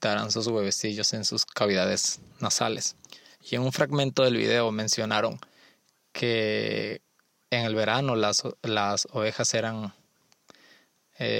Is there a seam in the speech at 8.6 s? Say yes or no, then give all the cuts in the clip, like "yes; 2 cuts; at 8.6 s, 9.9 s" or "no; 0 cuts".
no; 1 cut; at 3.3 s